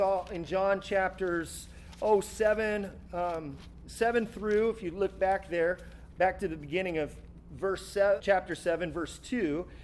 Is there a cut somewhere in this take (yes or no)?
yes